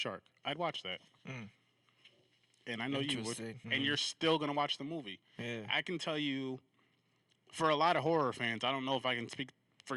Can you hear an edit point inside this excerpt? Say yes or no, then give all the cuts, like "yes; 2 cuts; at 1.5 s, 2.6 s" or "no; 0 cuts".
yes; 1 cut; at 3.6 s